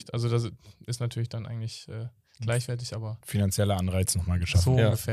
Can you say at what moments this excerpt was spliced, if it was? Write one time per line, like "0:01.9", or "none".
none